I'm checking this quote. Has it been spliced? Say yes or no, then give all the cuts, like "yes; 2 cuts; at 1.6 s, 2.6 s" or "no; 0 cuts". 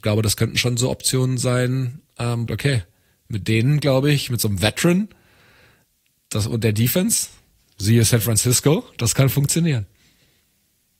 yes; 1 cut; at 2.5 s